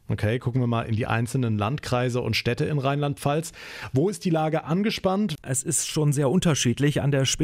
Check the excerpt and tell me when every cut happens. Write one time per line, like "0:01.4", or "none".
0:05.4